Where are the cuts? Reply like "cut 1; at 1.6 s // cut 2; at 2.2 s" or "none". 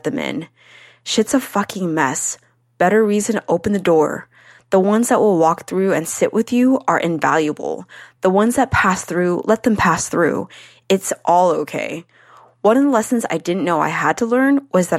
none